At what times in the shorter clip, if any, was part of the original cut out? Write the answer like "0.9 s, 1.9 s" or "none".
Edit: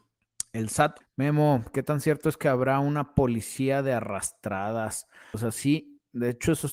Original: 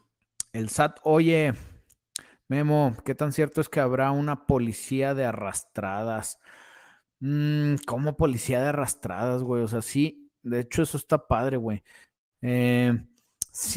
1.0 s, 5.3 s